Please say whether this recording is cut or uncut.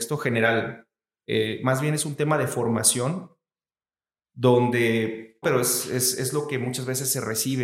cut